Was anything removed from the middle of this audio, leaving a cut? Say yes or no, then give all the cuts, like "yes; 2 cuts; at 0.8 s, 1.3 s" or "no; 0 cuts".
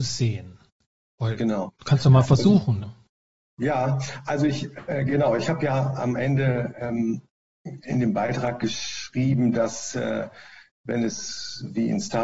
yes; 1 cut; at 2.8 s